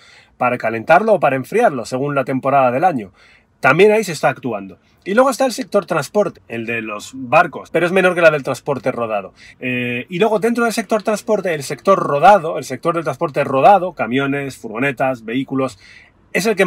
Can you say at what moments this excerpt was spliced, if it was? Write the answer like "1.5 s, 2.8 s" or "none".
6.3 s, 7.6 s, 9.5 s